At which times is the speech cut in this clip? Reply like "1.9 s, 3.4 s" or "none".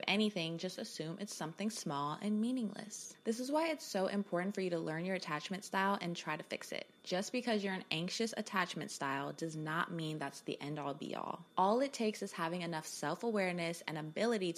11.5 s